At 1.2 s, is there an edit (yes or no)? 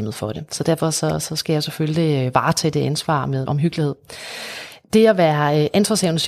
no